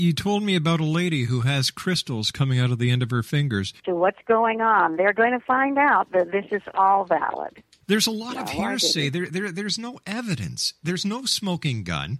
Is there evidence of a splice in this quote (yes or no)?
yes